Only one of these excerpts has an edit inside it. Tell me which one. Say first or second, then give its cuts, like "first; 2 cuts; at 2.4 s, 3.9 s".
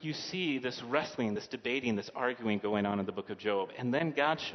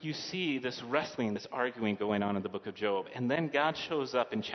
second; 1 cut; at 1.4 s